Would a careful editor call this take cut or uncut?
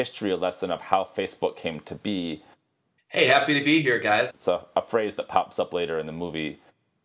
cut